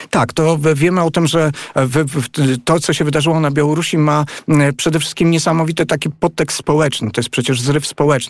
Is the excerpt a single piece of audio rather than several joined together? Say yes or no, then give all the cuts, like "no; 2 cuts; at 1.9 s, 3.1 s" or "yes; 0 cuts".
yes; 0 cuts